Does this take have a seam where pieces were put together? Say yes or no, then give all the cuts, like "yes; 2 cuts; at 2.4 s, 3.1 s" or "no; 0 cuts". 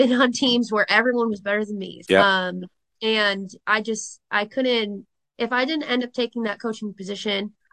yes; 1 cut; at 2.0 s